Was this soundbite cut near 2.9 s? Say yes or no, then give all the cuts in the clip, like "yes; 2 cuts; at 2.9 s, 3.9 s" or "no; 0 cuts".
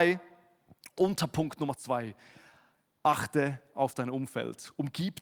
no; 0 cuts